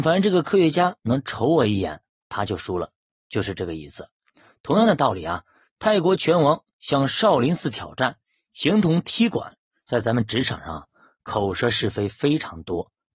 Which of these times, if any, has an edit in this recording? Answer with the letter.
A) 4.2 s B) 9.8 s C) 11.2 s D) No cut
B